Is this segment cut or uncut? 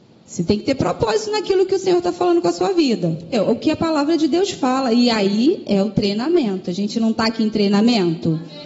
cut